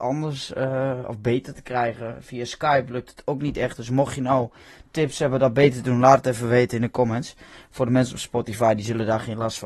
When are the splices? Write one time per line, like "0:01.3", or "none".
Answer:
none